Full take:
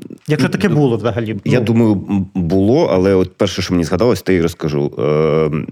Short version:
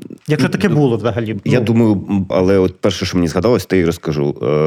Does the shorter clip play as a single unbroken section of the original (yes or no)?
no